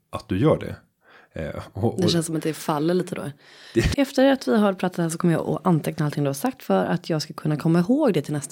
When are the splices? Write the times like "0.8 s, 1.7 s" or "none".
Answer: 3.9 s